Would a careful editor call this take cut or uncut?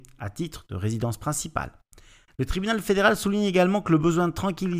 cut